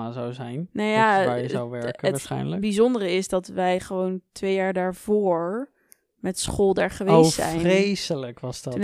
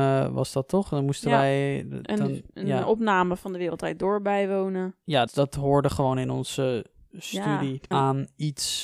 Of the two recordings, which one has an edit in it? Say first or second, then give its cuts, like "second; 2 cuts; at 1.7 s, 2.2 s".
second; 2 cuts; at 5.3 s, 7.9 s